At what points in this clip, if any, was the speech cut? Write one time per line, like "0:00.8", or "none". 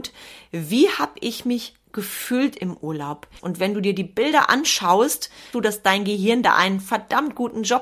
0:03.4
0:05.5